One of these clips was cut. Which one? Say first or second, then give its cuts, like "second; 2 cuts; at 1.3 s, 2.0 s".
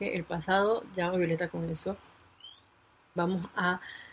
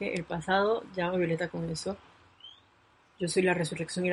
first; 1 cut; at 3.2 s